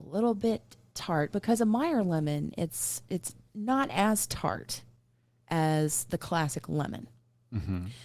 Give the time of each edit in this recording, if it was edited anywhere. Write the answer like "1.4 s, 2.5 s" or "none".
none